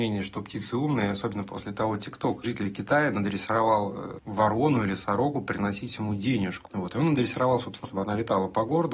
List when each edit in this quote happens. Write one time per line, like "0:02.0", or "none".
0:02.4
0:06.7
0:07.8